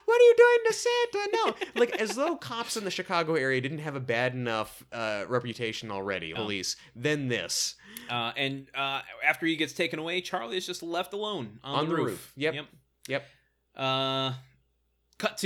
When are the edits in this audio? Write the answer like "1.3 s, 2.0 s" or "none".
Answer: 6.3 s